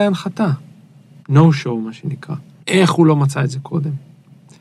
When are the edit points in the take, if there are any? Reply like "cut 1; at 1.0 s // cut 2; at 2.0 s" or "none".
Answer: cut 1; at 1.2 s // cut 2; at 2.6 s